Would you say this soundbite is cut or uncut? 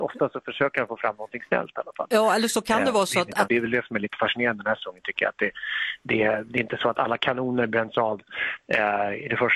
cut